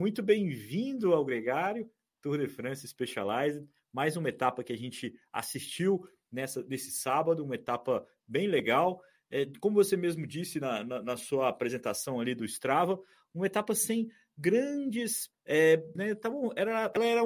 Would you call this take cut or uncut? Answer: cut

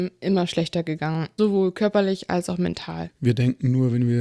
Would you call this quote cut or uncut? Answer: cut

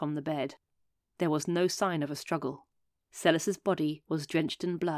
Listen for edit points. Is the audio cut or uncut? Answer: uncut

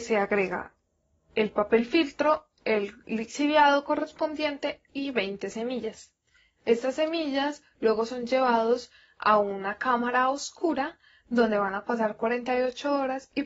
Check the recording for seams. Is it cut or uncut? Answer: cut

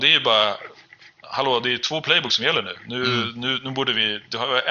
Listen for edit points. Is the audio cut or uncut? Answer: uncut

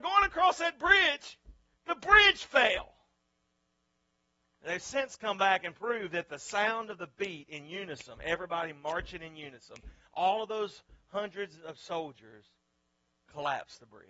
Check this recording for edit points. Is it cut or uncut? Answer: cut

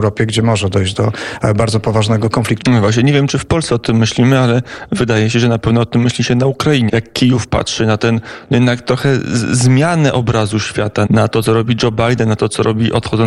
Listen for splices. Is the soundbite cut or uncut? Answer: cut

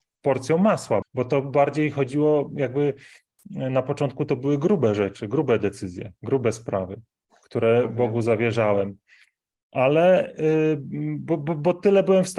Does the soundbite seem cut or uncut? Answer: cut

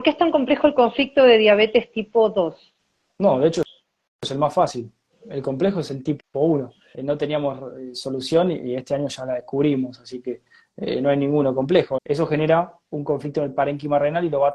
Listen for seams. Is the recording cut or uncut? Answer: cut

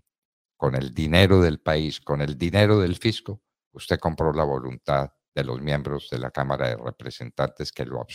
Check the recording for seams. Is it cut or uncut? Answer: uncut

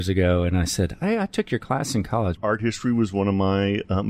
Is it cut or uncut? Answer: cut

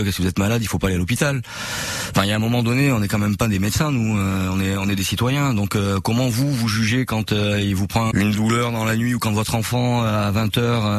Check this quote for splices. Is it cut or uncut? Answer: cut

